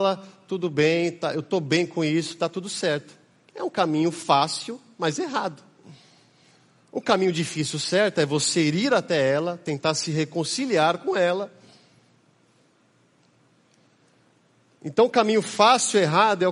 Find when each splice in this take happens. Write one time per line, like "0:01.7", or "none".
none

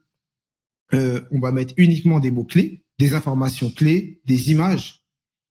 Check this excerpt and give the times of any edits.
0:01.3
0:02.9

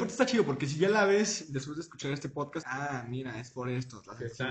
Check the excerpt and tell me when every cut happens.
0:02.6

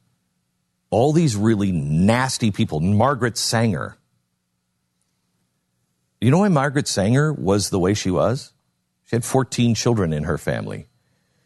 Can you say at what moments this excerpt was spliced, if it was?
none

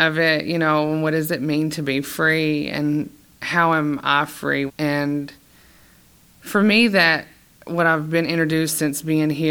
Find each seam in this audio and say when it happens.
0:04.7

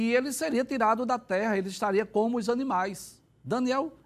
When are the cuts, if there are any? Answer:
none

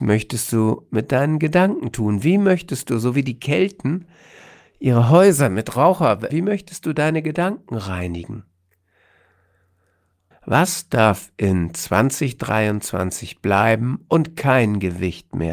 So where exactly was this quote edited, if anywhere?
0:06.3
0:10.3

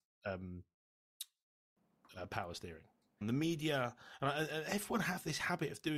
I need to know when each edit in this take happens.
0:03.2

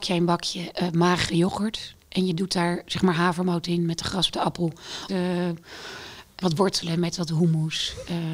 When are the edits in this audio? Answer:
0:05.1
0:06.4

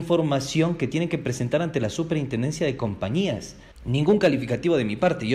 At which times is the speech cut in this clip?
0:03.7

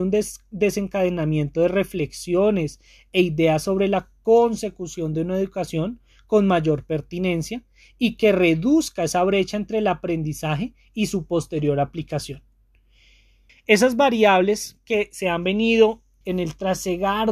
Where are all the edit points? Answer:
0:13.5
0:16.2

